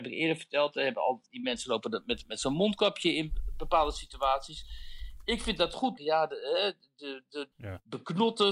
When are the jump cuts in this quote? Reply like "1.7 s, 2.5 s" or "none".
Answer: 6.0 s, 7.5 s